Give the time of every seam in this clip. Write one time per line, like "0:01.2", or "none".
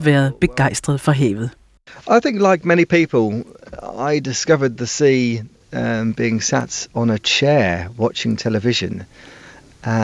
none